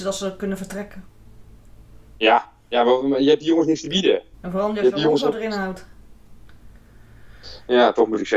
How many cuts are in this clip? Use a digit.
2